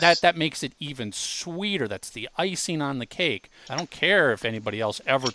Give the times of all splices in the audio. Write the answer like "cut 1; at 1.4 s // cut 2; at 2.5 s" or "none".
cut 1; at 3.7 s